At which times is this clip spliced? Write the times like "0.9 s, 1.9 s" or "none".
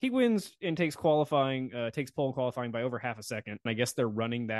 3.7 s